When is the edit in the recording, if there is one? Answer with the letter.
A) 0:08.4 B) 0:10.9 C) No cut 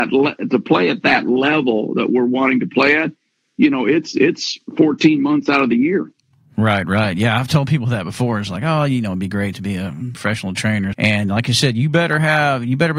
B